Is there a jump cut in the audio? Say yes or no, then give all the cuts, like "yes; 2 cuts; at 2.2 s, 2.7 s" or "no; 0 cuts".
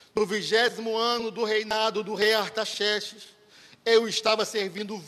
no; 0 cuts